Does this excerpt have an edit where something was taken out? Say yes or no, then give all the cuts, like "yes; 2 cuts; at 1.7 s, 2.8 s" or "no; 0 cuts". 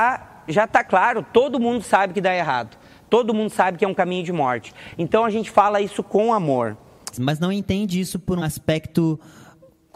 yes; 2 cuts; at 7.1 s, 8.4 s